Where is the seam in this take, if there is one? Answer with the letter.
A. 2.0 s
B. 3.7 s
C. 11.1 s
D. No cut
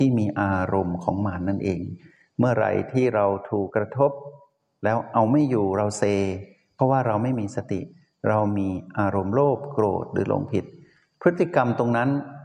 B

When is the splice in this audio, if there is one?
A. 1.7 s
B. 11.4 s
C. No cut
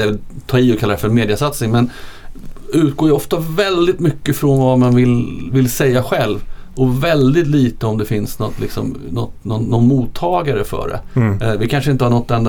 C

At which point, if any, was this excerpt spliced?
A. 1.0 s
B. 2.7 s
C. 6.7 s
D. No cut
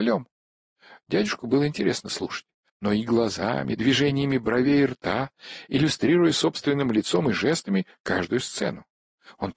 B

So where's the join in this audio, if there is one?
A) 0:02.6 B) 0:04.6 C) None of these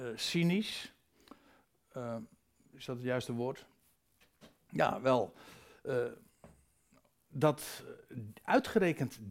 C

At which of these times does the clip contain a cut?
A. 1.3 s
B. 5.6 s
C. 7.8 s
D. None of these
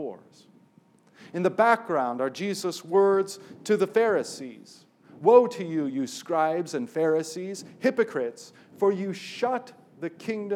D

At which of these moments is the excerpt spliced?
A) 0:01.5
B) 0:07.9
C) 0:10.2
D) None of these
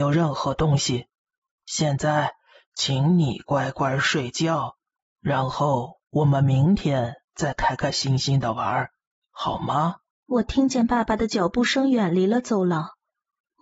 C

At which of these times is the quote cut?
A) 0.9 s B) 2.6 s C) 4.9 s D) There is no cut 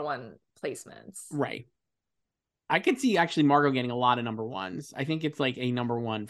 B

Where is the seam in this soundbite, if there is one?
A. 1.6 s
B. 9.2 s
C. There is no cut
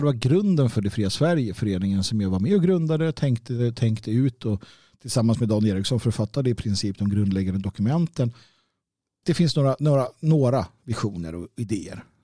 B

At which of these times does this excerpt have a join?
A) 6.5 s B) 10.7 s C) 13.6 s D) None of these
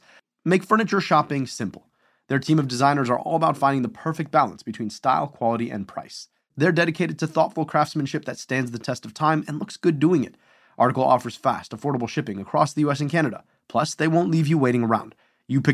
D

